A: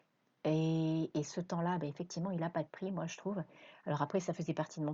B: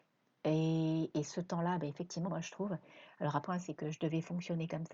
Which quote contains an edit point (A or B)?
B